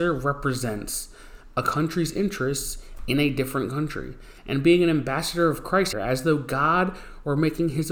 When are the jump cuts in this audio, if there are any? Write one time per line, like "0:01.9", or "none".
0:05.9